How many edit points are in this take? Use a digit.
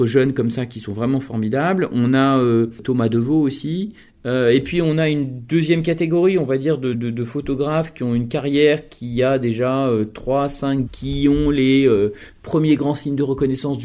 2